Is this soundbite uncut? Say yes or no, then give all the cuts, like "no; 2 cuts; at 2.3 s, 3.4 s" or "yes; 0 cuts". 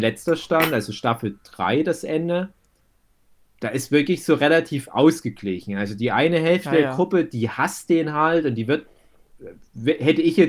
yes; 0 cuts